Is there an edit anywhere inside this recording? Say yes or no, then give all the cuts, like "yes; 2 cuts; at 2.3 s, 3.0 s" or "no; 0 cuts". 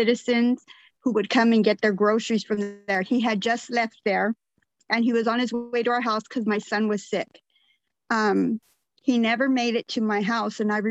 no; 0 cuts